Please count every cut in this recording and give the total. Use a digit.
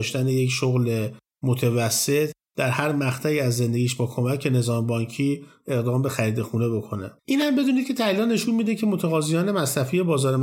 1